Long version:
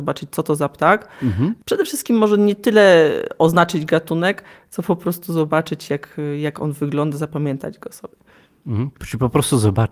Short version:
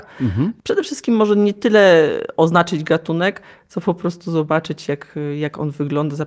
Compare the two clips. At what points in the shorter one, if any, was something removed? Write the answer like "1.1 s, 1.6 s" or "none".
none